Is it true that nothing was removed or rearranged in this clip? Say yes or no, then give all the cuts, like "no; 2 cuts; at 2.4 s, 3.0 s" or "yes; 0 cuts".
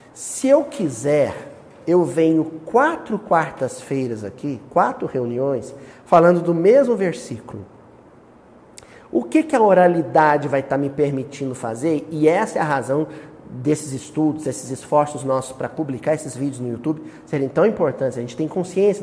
yes; 0 cuts